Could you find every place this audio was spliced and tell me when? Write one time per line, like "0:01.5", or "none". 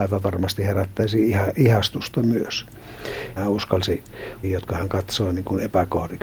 0:03.4
0:04.4